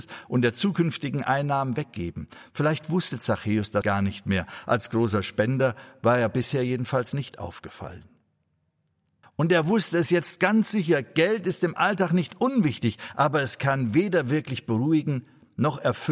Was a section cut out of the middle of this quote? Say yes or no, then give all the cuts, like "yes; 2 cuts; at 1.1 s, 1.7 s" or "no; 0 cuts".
yes; 2 cuts; at 3.8 s, 9.2 s